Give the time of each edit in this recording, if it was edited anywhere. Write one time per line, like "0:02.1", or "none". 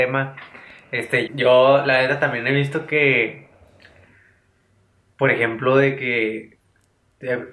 0:01.3

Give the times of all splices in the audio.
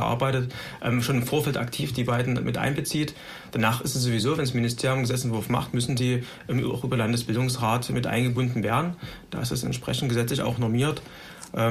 none

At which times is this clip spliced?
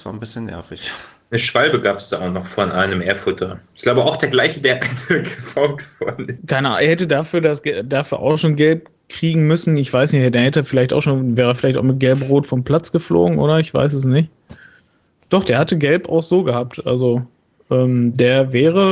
0:06.4

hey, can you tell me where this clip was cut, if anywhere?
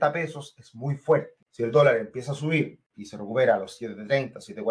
0:01.4
0:02.9

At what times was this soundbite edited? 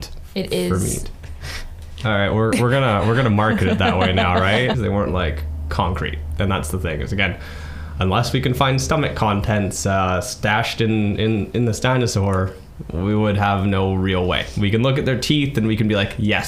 0:01.1
0:04.7

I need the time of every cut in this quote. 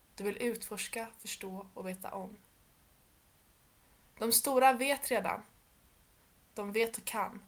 none

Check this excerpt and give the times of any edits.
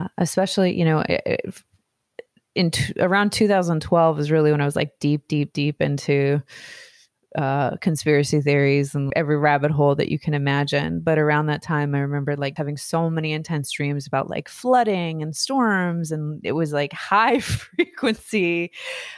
0:09.1
0:12.6

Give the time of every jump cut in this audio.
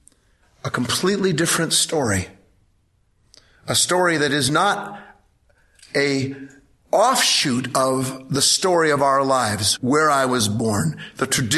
0:09.8

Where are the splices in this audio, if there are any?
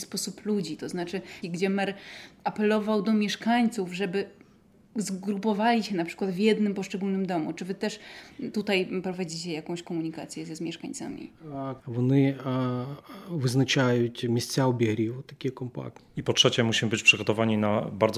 0:01.4
0:11.8
0:16.0

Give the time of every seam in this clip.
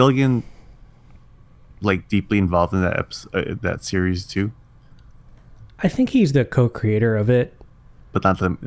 none

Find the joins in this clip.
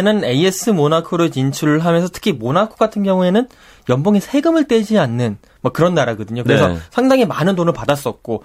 none

